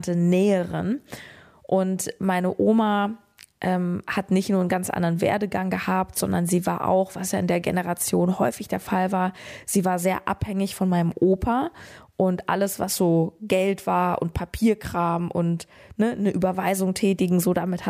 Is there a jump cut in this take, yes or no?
no